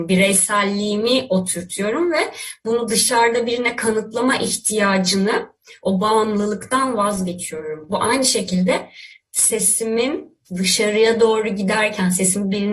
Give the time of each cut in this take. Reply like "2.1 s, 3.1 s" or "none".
10.5 s